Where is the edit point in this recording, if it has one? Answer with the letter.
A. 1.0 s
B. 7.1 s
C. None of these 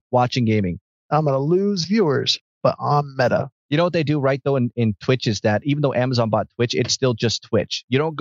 A